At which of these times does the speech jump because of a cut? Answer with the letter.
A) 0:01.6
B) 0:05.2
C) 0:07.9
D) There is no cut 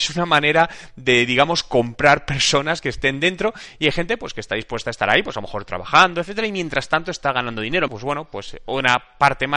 C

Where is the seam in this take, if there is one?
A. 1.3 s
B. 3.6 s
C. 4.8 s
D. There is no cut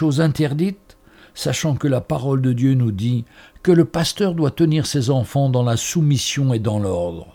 D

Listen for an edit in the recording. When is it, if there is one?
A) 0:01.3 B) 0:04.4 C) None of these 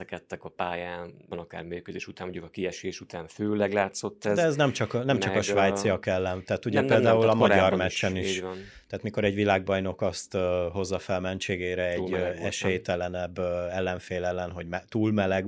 A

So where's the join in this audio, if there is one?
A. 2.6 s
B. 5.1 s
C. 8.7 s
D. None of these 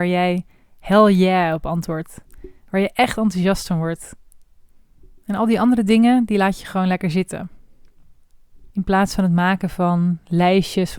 C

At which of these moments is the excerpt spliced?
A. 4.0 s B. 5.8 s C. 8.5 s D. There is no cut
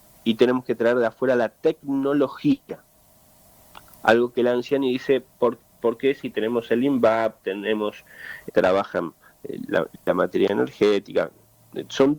C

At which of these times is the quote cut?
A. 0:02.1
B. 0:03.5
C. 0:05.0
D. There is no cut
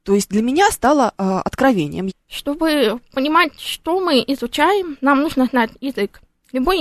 A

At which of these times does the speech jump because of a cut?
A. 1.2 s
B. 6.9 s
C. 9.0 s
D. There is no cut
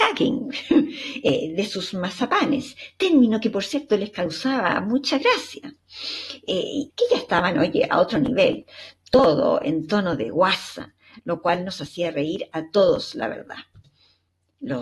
B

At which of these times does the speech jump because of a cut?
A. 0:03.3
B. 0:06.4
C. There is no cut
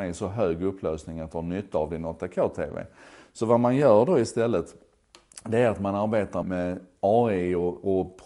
B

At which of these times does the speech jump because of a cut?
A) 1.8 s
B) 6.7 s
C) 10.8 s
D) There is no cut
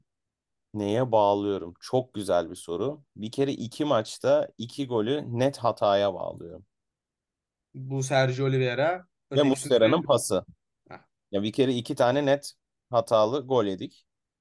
C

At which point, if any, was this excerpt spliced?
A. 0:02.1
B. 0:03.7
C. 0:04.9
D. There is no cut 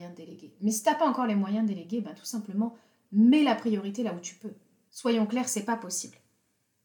C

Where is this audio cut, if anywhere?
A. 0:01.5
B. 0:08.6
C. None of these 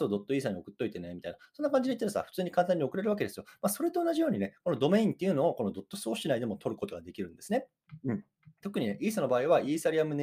B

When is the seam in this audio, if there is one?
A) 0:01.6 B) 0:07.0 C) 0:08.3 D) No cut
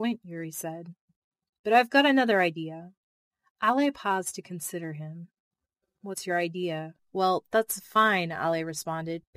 B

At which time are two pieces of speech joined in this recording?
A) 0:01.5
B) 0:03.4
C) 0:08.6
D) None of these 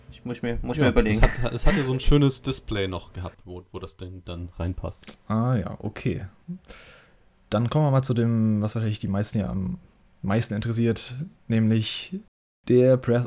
B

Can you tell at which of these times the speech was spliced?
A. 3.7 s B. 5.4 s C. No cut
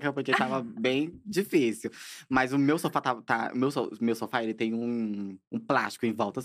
B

